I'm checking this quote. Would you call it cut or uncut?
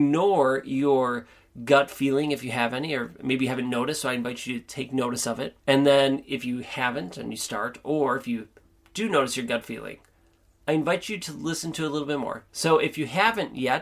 cut